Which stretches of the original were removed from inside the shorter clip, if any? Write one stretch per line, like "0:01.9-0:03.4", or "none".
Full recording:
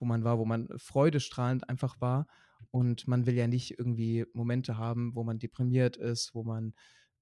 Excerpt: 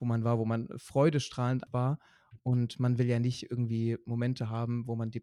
0:01.7-0:01.9